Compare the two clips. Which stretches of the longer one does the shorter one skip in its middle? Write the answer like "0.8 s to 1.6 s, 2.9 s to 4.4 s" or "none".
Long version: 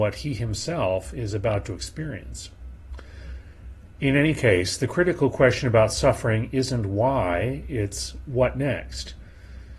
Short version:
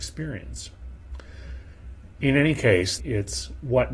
4.8 s to 7.6 s